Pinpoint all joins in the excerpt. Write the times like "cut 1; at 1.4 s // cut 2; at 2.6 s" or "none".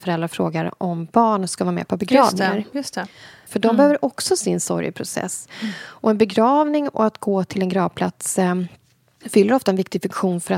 cut 1; at 3.5 s